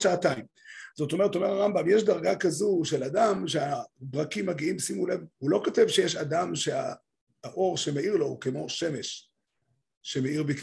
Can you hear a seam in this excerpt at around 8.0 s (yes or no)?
no